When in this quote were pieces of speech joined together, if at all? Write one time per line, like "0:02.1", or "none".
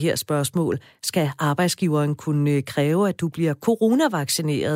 none